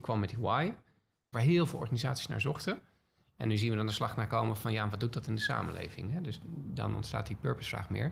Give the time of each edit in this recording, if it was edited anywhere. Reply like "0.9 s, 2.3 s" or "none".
1.3 s

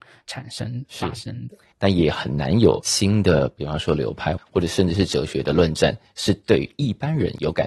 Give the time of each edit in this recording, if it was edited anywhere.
1.7 s, 4.4 s

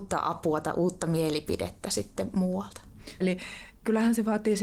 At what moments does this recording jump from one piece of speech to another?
3.2 s

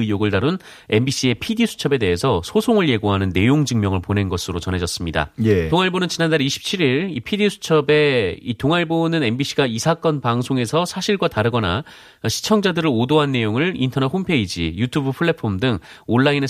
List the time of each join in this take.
5.7 s

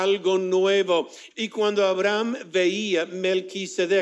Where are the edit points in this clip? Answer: 1.3 s

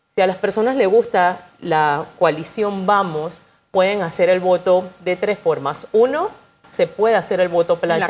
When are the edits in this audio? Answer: 6.6 s

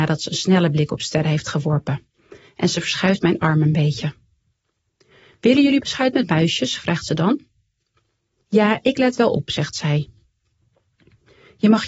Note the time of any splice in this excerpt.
8.4 s

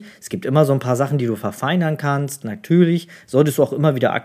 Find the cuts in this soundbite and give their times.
none

